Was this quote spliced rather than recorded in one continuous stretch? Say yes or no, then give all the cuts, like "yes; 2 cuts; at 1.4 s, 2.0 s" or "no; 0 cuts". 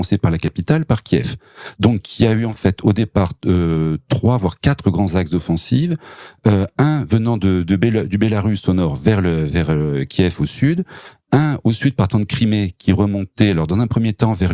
no; 0 cuts